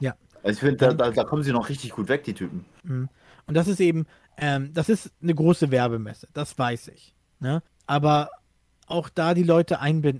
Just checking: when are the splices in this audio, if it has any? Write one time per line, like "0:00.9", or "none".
0:07.7